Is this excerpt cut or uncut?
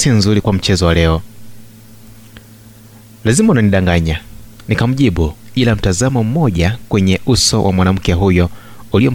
uncut